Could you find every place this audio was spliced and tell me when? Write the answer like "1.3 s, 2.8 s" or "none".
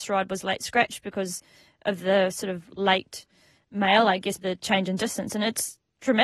4.4 s